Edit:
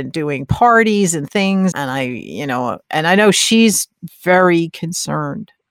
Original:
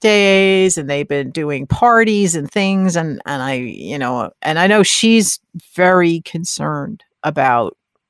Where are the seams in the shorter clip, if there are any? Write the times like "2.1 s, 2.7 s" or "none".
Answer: 1.7 s

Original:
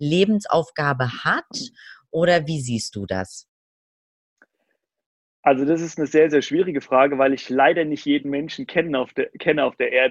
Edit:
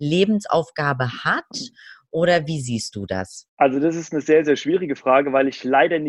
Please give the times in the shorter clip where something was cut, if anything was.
3.5 s

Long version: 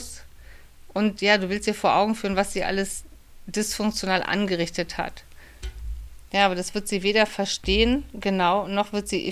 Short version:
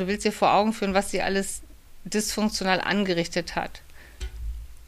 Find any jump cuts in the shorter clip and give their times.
none

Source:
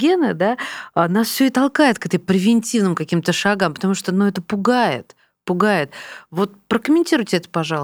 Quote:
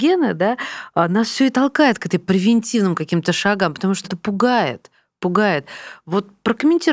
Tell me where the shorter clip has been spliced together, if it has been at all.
4.0 s

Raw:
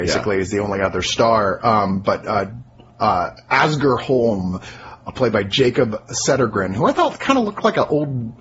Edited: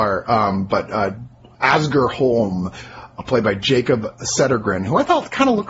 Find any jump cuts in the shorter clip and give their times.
1.5 s

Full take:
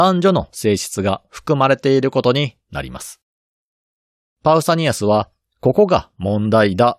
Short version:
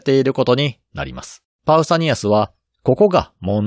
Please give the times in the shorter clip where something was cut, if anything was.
1.5 s

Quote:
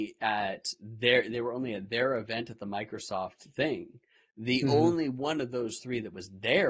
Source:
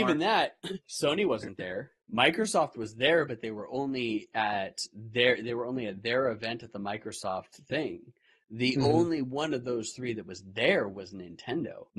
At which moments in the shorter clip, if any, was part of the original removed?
none

